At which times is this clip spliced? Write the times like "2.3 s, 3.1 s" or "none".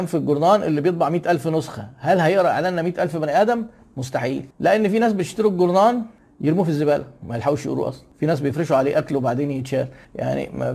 4.5 s